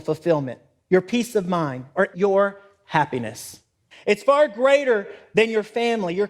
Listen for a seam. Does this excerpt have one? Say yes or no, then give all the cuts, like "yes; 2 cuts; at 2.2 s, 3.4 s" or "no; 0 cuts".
yes; 2 cuts; at 2.1 s, 3.9 s